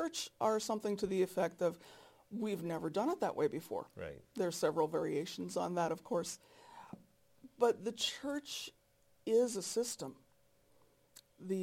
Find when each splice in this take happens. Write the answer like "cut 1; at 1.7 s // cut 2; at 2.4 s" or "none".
none

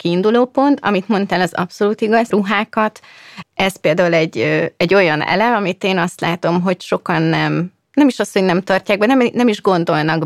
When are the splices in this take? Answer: cut 1; at 2.3 s // cut 2; at 3.4 s

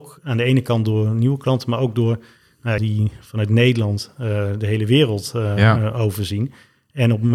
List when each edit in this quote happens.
cut 1; at 2.8 s

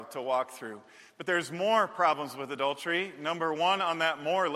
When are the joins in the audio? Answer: none

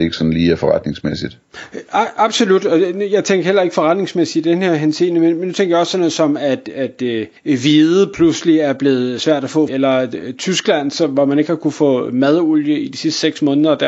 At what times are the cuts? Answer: cut 1; at 7.4 s // cut 2; at 9.7 s

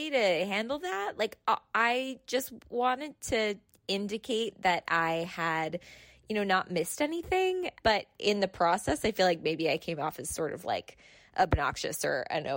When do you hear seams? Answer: cut 1; at 7.8 s

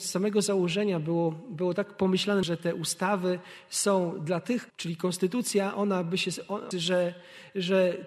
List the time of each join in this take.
cut 1; at 2.4 s // cut 2; at 4.7 s // cut 3; at 6.7 s

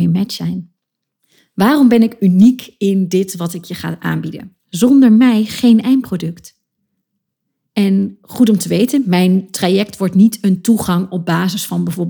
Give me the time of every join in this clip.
cut 1; at 4.6 s

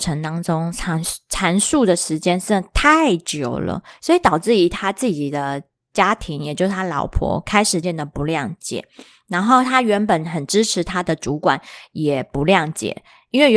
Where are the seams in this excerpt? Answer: cut 1; at 7.8 s

